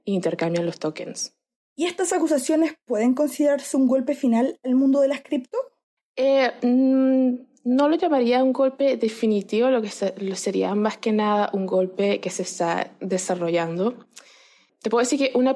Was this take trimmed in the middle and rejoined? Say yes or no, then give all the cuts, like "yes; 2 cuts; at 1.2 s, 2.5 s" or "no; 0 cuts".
no; 0 cuts